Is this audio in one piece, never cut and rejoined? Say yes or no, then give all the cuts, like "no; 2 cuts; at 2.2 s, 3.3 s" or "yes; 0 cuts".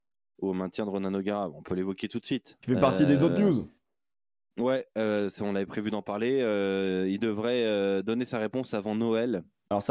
yes; 0 cuts